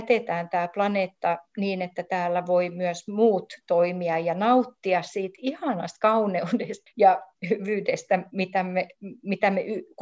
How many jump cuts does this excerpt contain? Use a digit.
1